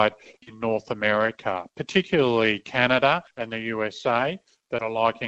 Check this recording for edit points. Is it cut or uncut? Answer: uncut